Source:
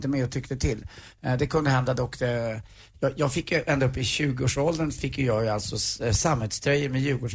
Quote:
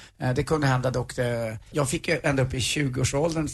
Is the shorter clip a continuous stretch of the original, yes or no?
no